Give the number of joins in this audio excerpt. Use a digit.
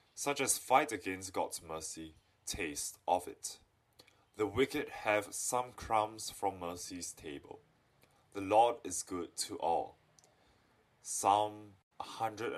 0